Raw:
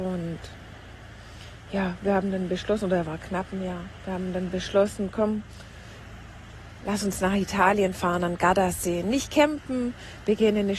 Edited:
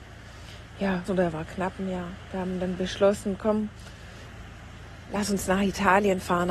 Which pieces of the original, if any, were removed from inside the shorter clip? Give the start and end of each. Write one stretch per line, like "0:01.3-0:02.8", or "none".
0:02.0-0:02.8